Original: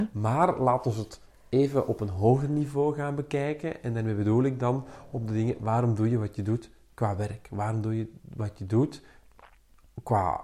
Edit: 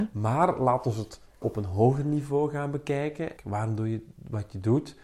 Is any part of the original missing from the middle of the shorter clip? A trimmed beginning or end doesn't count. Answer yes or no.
yes